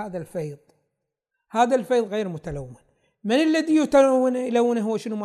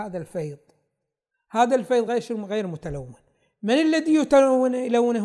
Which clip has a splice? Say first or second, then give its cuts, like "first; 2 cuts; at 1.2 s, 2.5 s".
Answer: first; 1 cut; at 2.1 s